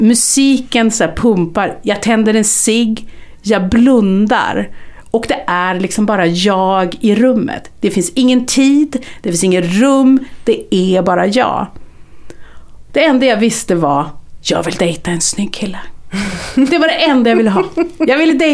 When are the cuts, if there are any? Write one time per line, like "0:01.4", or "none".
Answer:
0:12.9